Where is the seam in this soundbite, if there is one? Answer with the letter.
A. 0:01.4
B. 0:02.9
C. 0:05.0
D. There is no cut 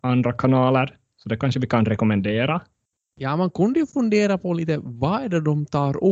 B